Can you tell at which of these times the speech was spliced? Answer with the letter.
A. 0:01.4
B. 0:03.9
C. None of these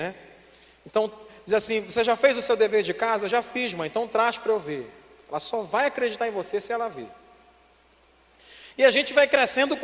C